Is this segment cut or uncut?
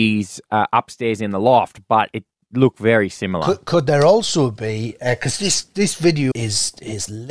cut